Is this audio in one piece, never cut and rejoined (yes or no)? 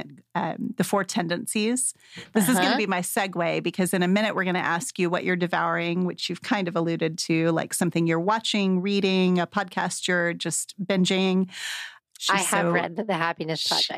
no